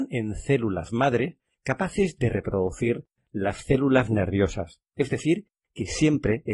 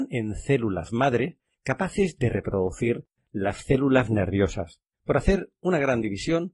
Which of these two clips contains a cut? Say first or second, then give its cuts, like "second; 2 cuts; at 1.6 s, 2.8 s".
second; 1 cut; at 4.9 s